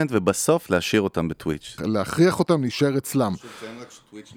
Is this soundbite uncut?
no; 1 cut; at 1.8 s

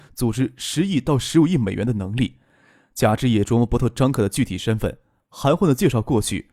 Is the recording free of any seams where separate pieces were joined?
yes; 0 cuts

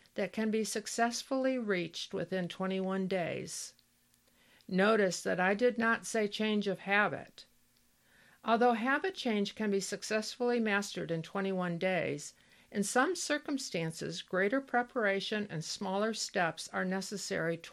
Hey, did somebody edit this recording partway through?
no; 0 cuts

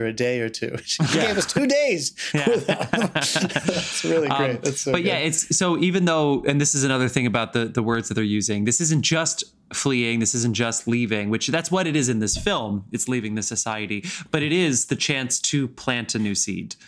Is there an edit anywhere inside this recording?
no; 0 cuts

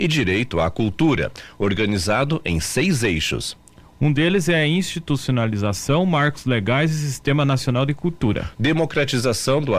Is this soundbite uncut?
yes; 0 cuts

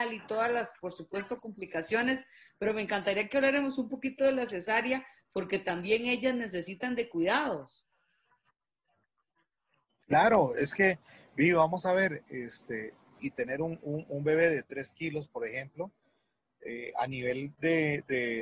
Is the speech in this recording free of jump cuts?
no; 1 cut; at 13.2 s

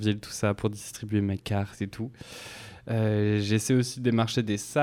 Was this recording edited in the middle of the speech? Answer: no; 0 cuts

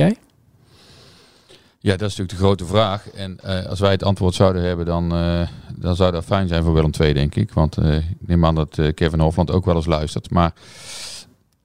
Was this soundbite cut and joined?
no; 0 cuts

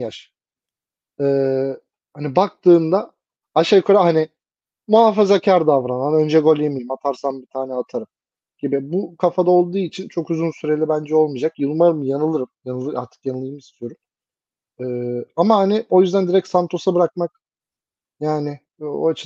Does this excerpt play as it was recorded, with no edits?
yes; 0 cuts

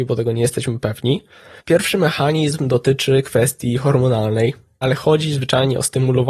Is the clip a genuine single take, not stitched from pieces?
no; 2 cuts; at 1.6 s, 4.8 s

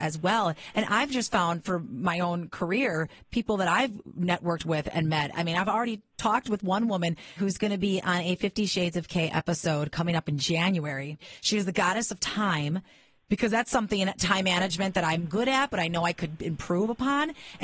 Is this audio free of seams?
no; 1 cut; at 7.4 s

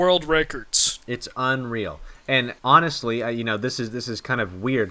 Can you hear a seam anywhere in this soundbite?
yes; 1 cut; at 2.6 s

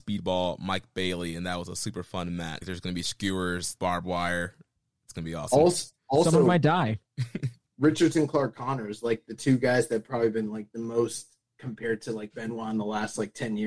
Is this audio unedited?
no; 2 cuts; at 2.6 s, 3.8 s

